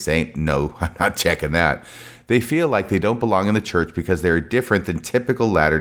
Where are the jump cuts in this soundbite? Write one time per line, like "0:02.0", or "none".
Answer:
none